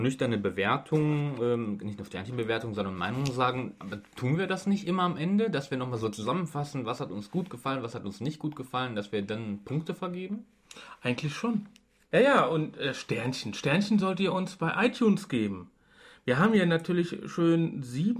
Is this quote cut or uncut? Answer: uncut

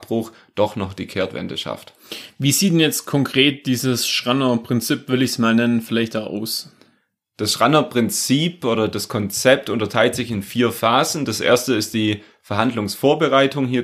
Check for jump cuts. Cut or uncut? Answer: uncut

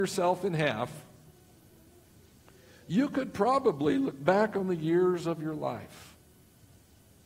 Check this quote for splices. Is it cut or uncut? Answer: uncut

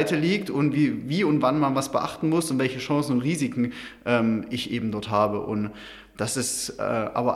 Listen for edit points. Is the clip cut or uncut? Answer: uncut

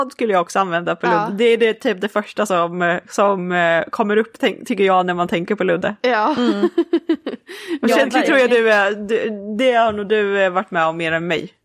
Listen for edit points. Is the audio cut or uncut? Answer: uncut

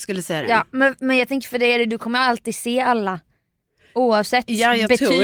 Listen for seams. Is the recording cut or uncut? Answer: uncut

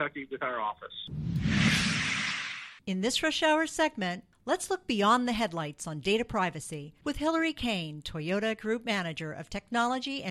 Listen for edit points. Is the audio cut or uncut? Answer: uncut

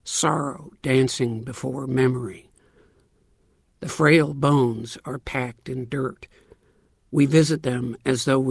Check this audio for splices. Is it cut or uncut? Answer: uncut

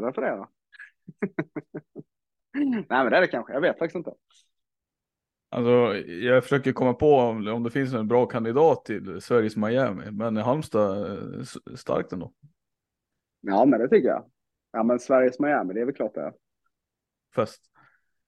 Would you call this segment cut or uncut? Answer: cut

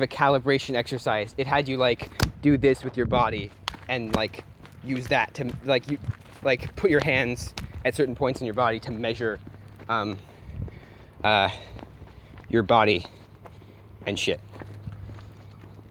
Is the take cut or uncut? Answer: uncut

